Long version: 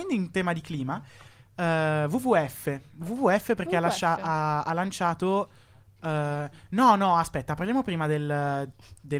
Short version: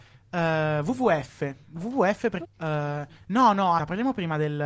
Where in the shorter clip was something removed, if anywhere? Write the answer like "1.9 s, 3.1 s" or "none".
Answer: 2.4 s, 3.8 s